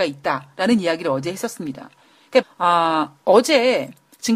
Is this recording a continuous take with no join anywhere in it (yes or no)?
no